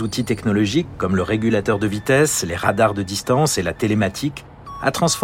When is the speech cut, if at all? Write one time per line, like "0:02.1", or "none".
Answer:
none